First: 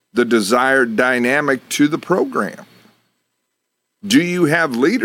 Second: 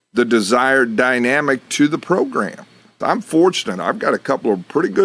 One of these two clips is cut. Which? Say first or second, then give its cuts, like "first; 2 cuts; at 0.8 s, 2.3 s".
second; 1 cut; at 3.0 s